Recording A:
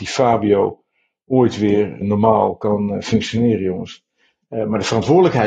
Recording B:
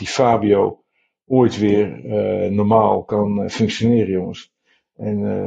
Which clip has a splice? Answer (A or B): A